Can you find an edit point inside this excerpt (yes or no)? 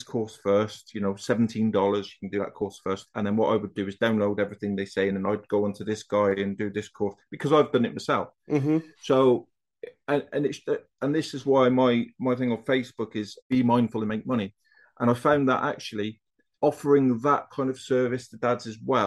no